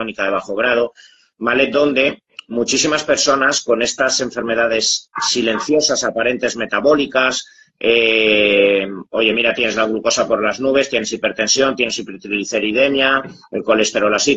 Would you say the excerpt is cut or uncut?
uncut